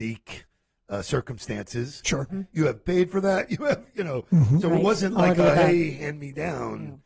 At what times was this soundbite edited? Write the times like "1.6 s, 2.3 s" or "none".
2.3 s